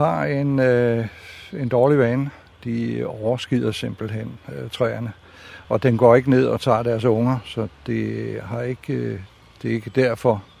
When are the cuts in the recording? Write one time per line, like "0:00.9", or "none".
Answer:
0:05.6